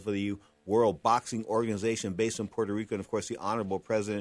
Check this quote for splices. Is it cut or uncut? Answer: uncut